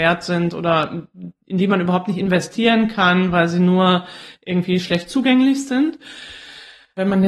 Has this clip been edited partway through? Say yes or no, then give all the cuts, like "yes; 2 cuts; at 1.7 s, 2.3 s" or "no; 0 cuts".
no; 0 cuts